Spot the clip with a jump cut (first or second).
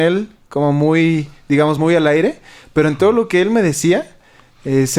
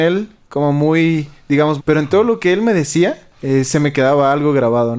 second